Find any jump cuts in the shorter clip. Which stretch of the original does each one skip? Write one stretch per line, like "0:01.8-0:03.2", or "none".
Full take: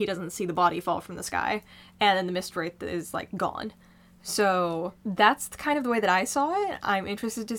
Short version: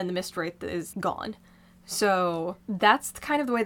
0:03.1-0:03.3